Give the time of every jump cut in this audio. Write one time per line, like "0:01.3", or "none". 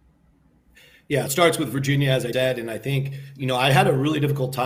0:01.3
0:02.3